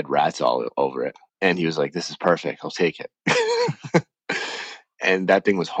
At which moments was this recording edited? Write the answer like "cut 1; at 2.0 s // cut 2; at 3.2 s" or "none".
cut 1; at 1.3 s